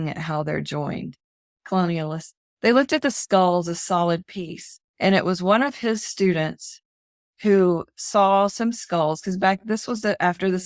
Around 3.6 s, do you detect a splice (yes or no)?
no